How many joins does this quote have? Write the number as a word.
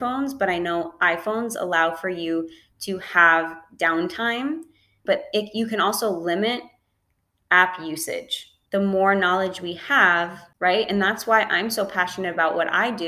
three